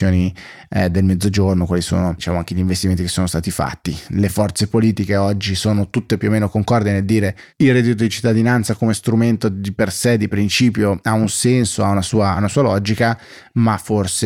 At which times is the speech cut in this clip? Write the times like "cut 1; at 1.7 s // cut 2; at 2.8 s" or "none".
none